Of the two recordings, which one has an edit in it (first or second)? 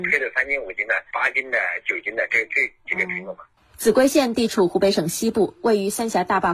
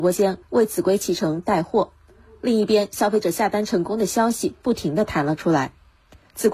first